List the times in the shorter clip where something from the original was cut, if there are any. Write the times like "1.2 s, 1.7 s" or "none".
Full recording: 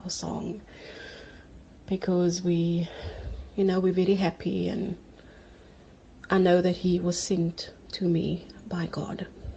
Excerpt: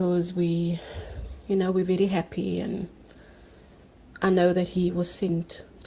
none